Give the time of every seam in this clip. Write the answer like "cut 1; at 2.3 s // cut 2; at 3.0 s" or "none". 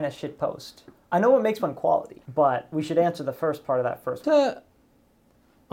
cut 1; at 2.3 s // cut 2; at 4.2 s